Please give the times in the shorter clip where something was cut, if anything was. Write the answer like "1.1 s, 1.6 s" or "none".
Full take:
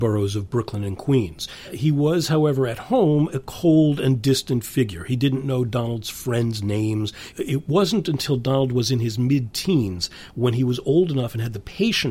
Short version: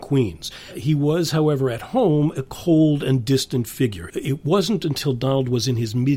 4.1 s

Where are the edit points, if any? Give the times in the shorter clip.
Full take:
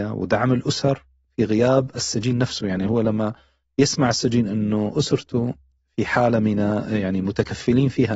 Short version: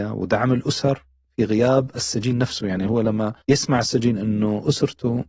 3.4 s

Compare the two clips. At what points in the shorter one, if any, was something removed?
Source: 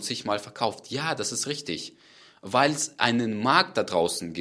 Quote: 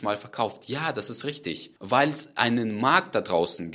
1.8 s

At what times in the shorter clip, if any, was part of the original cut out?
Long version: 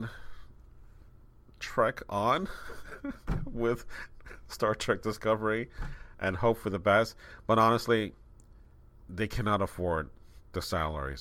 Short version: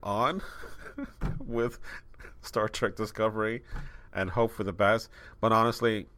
none

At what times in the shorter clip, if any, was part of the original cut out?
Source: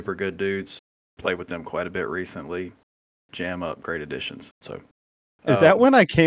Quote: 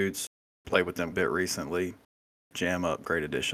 1.1 s

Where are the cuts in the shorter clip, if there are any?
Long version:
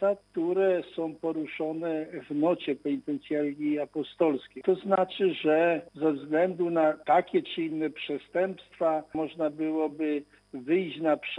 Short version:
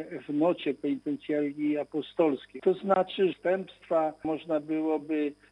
3.3 s

